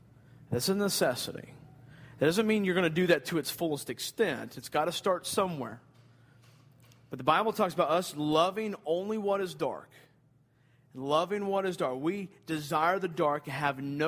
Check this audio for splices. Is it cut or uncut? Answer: uncut